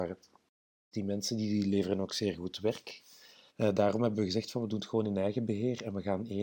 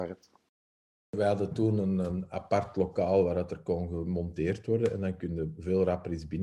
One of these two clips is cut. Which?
first; 2 cuts; at 0.9 s, 3.5 s

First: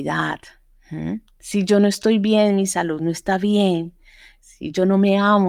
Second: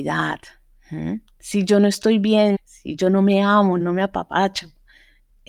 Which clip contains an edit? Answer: second; 2 cuts; at 2.5 s, 3.8 s

